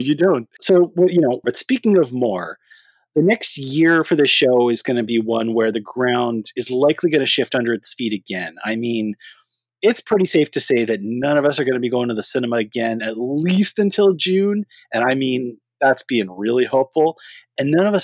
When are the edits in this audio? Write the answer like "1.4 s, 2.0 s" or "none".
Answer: 1.4 s